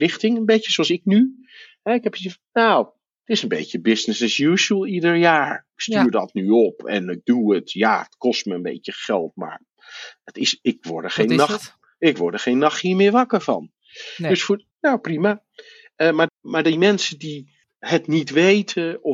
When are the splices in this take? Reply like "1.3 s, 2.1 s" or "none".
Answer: 14.7 s, 16.3 s, 17.6 s